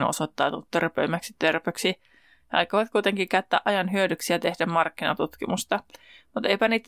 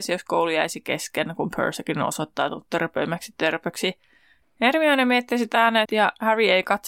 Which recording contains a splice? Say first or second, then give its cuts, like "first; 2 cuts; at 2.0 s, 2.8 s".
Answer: second; 2 cuts; at 4.4 s, 5.8 s